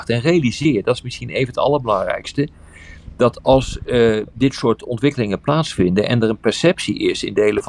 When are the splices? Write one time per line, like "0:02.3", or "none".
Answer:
0:04.3